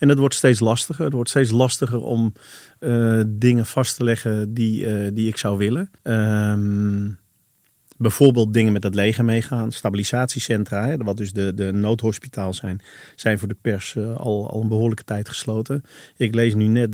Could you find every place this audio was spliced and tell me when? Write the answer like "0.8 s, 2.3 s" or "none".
6.0 s